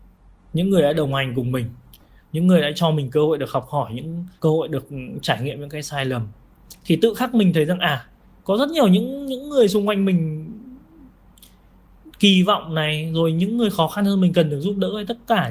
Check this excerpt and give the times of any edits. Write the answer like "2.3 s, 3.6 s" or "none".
4.4 s